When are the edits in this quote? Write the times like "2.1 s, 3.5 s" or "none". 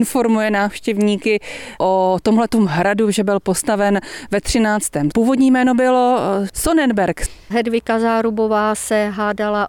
5.1 s, 7.5 s